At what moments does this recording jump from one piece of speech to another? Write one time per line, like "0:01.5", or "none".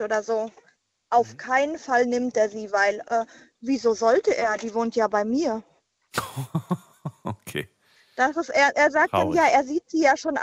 none